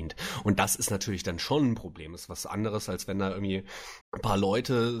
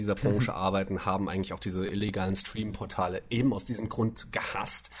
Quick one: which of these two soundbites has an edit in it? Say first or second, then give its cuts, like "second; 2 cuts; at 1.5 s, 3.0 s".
first; 1 cut; at 4.0 s